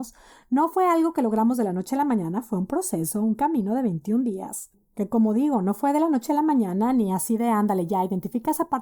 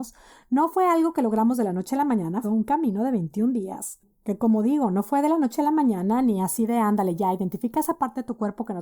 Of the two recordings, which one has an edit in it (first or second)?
second